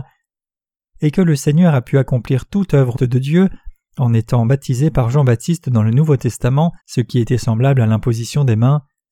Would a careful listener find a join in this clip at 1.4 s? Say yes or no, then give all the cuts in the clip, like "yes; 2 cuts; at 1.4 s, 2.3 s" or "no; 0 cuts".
no; 2 cuts; at 2.9 s, 6.8 s